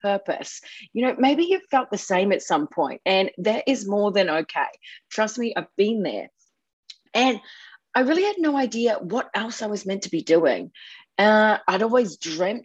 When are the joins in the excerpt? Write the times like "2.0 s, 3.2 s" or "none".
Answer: none